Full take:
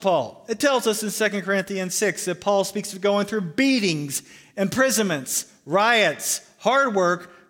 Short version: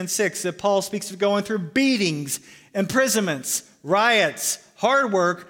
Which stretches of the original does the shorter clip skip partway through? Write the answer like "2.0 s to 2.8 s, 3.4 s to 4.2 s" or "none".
none